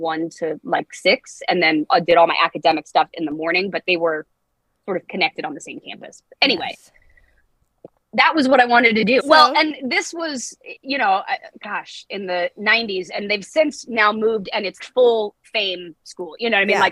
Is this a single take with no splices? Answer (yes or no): no